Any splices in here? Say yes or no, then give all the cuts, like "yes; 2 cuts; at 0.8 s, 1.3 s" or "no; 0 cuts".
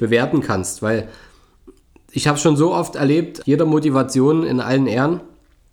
yes; 1 cut; at 3.4 s